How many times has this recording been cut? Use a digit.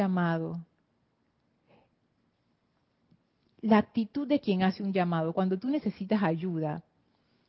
0